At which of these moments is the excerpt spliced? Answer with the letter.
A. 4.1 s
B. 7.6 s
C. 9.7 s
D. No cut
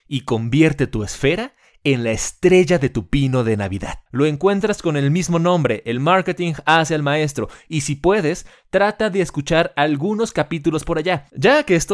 A